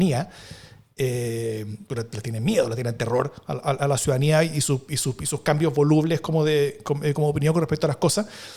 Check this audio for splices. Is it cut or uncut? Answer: uncut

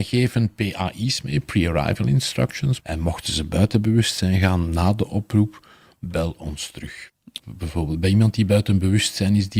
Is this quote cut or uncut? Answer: cut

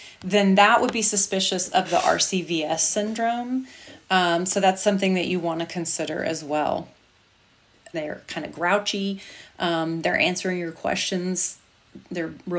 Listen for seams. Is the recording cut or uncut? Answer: cut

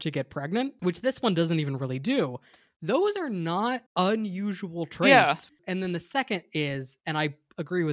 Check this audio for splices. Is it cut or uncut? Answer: cut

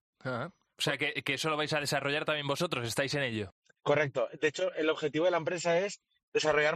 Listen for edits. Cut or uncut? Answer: uncut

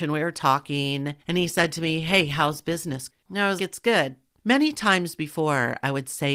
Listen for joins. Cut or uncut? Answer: cut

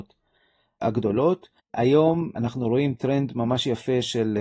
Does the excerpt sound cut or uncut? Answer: cut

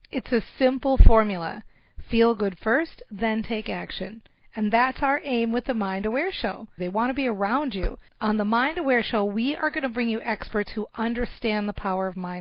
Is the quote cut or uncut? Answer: cut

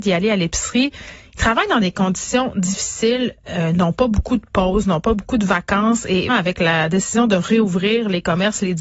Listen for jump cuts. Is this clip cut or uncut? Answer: cut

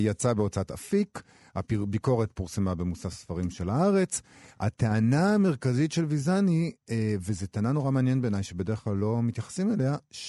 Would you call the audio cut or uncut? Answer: uncut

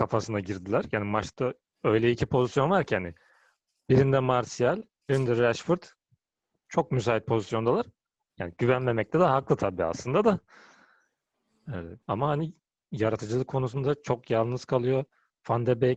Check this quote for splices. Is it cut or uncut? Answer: cut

